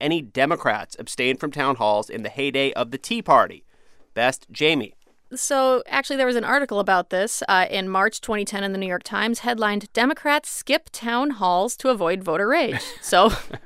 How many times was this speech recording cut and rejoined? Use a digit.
0